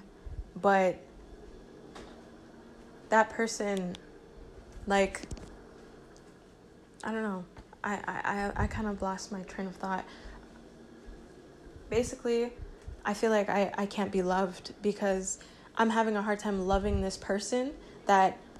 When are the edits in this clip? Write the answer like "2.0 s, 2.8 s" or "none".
none